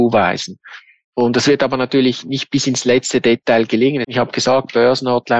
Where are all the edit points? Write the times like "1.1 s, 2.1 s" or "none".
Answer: 4.0 s